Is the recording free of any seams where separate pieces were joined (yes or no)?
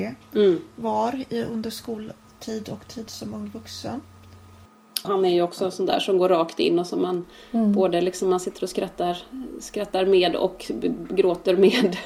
no